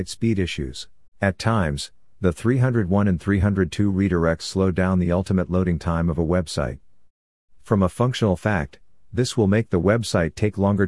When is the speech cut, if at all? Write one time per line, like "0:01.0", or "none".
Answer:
0:01.1